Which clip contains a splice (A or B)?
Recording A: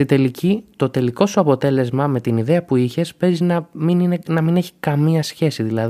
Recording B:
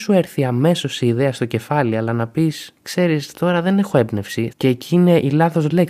B